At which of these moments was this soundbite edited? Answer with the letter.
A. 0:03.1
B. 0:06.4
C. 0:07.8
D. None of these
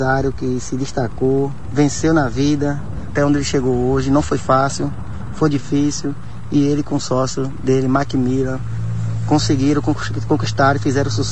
A